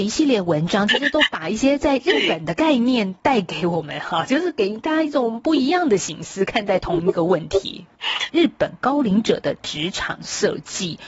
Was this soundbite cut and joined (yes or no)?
yes